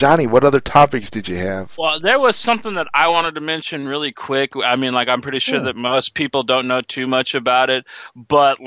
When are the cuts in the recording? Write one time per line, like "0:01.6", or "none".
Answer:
none